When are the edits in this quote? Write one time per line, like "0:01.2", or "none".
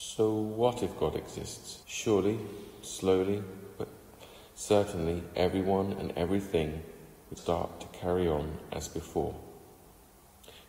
0:01.8
0:07.4